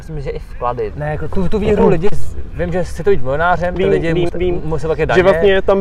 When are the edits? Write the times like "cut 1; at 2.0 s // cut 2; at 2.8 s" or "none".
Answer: cut 1; at 0.9 s // cut 2; at 4.3 s